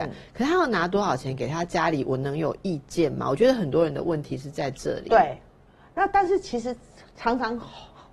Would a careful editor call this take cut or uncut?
uncut